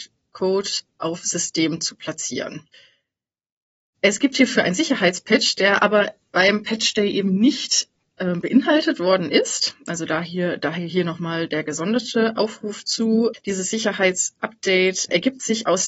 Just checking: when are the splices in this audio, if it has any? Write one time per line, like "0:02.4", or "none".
none